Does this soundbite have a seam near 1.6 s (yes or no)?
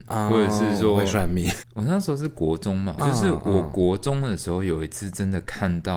yes